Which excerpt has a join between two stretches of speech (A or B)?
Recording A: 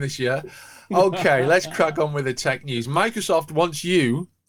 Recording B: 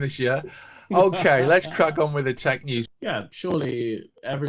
B